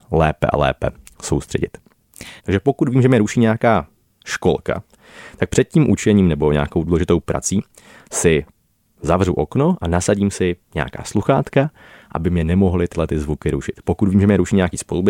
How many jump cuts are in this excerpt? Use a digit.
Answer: 1